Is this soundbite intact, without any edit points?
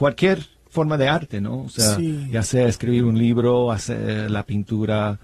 yes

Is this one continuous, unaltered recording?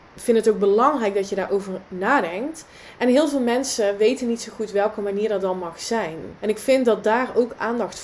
no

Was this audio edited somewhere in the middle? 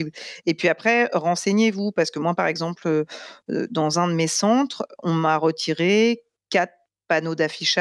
no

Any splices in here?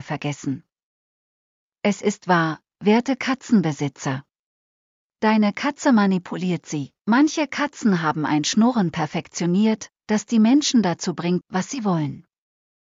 yes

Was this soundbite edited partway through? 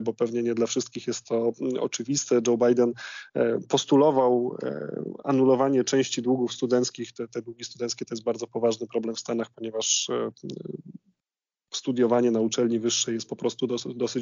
no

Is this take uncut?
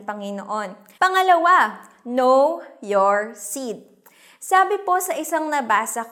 no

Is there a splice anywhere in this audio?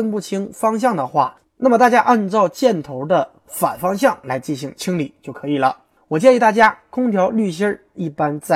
yes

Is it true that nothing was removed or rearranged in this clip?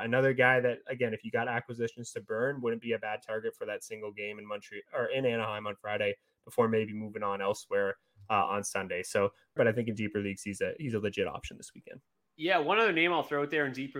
no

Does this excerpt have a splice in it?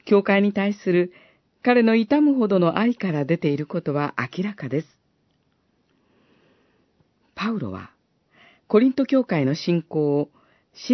no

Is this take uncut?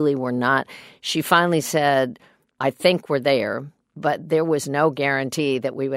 no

